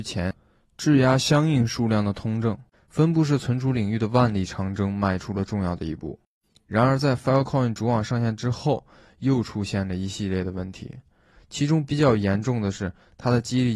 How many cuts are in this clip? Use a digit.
1